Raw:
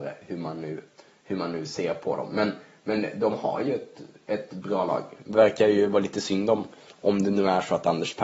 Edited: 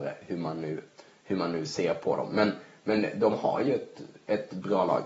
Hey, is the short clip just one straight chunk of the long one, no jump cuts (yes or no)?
yes